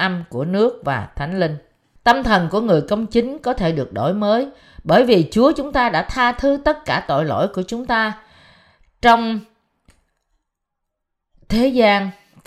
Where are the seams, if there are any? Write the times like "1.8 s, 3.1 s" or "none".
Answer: 2.0 s